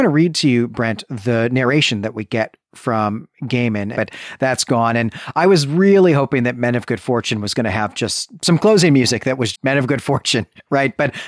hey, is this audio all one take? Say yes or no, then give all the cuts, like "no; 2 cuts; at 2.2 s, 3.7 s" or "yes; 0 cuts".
no; 2 cuts; at 3.9 s, 9.5 s